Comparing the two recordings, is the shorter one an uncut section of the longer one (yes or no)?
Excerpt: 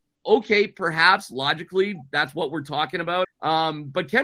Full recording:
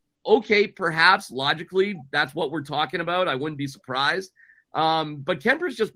no